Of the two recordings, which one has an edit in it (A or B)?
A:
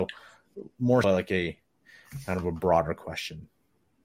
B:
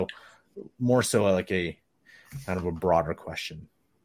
A